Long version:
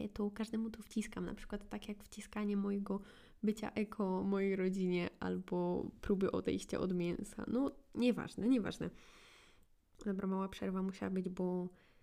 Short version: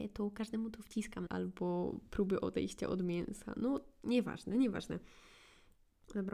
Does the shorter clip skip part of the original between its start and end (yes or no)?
yes